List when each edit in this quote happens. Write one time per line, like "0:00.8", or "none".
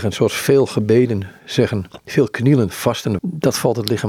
0:03.2

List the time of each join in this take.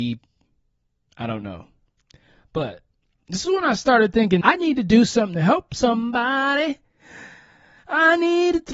0:04.4

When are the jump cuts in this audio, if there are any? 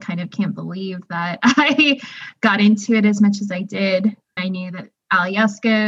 0:04.4

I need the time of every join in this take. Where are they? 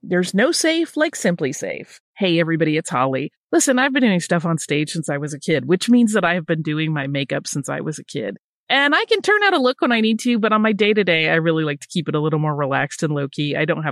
none

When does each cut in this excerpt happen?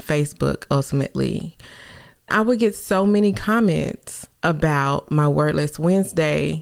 0:02.3
0:04.4

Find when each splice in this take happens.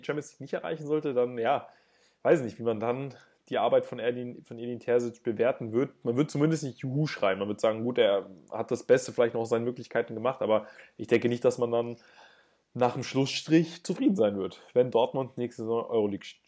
none

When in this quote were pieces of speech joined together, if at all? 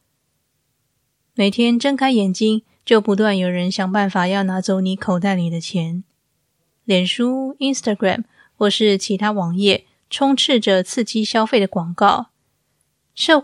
none

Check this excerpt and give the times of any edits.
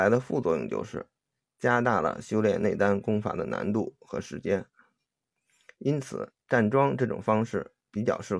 none

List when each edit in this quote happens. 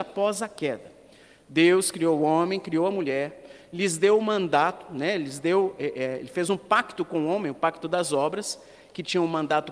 none

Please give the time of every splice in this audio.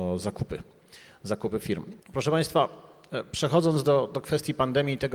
0:02.0

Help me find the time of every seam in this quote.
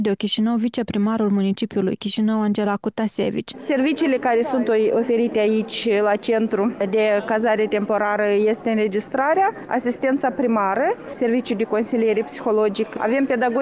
0:03.5

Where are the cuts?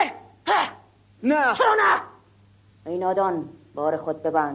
0:01.2

